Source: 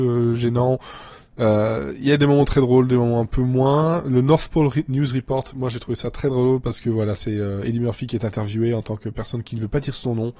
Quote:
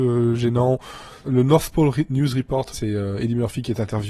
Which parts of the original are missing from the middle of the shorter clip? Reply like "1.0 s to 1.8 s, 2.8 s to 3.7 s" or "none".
1.2 s to 4.0 s, 5.5 s to 7.2 s